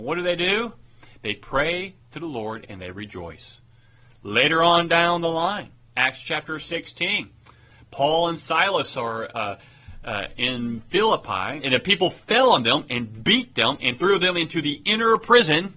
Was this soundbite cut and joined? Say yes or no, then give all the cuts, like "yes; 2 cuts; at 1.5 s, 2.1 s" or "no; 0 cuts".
yes; 1 cut; at 11.6 s